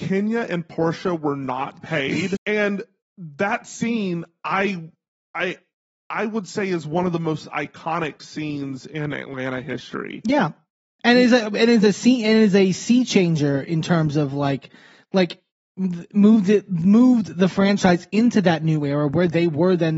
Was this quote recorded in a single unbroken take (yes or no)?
no